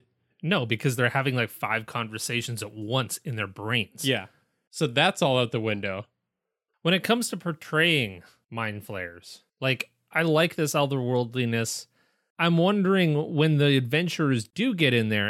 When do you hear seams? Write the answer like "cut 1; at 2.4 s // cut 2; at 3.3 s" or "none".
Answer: none